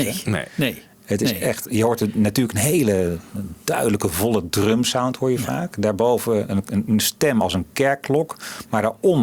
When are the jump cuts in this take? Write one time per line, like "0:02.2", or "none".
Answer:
none

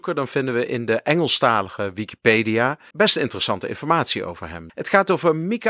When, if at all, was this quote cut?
0:02.9
0:04.7

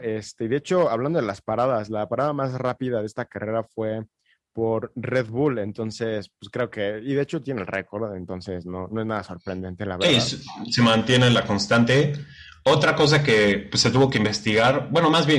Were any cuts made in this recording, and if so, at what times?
none

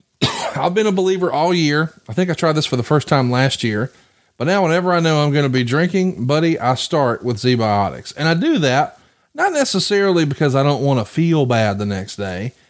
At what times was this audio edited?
none

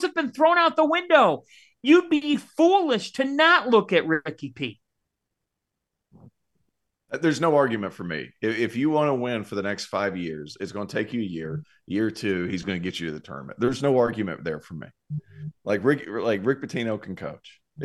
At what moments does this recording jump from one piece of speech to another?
none

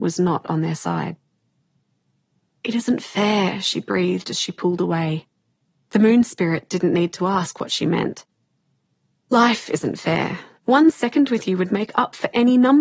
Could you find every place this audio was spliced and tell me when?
0:10.6

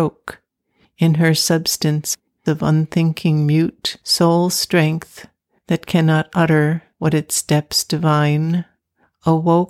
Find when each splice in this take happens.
none

